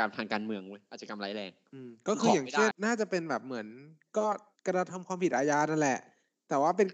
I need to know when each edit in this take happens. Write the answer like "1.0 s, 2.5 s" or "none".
2.7 s